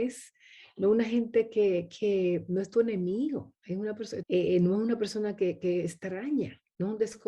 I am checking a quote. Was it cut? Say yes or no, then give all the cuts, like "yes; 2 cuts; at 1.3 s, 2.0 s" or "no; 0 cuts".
yes; 1 cut; at 4.2 s